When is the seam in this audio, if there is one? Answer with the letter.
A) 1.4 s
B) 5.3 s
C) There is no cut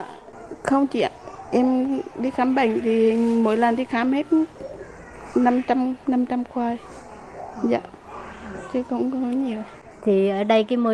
C